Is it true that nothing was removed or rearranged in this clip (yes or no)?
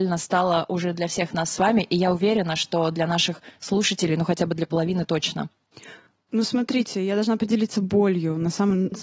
yes